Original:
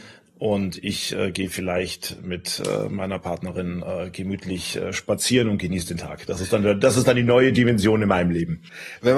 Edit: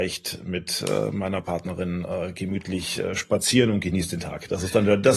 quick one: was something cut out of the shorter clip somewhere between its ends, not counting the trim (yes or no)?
no